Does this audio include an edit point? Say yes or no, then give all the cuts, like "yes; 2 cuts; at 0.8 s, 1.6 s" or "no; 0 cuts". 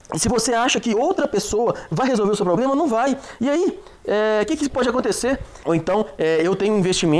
yes; 1 cut; at 5.6 s